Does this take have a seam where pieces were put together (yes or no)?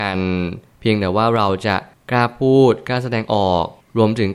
no